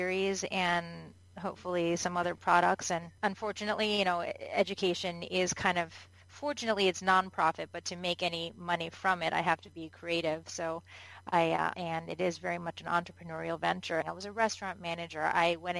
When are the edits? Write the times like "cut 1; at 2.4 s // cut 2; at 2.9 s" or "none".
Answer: cut 1; at 11.7 s // cut 2; at 14.0 s